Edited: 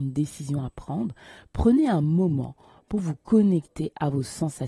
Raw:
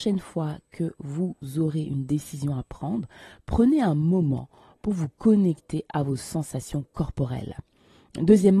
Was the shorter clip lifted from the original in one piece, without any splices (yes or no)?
yes